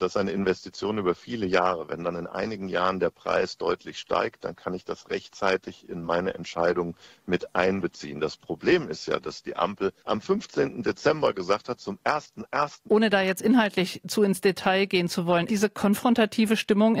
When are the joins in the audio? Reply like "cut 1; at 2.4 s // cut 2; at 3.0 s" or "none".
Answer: cut 1; at 10.0 s // cut 2; at 12.9 s // cut 3; at 15.5 s